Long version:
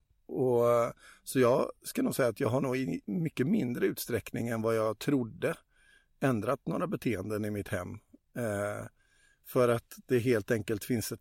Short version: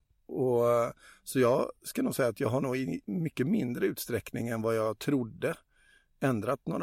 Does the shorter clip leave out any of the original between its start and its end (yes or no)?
no